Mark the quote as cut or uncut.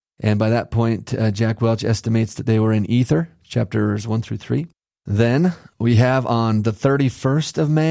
uncut